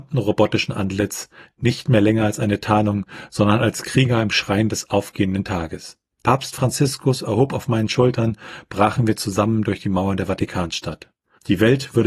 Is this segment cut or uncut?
uncut